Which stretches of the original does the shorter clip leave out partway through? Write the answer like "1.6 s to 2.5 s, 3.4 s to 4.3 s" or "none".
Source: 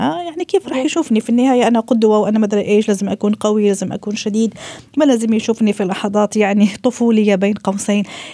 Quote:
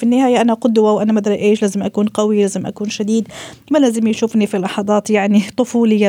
none